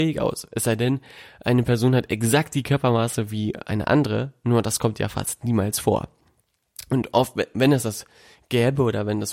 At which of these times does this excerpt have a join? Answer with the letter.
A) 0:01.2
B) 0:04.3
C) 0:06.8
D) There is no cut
D